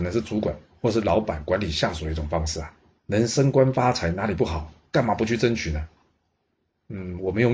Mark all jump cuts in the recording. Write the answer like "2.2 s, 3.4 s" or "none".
3.0 s